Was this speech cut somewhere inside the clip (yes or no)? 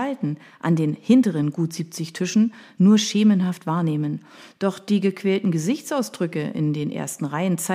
no